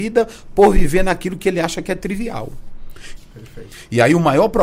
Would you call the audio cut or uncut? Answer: cut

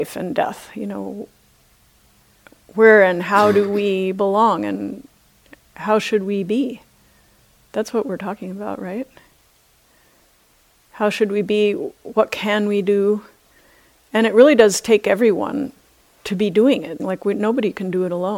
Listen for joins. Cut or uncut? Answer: cut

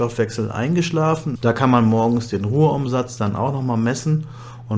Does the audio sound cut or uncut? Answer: cut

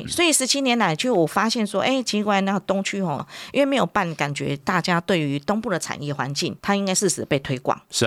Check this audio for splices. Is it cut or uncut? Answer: cut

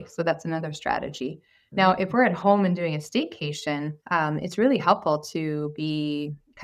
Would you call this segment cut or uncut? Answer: cut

